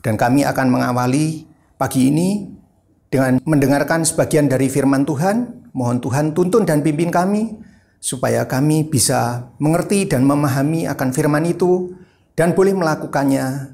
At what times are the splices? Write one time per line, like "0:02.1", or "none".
none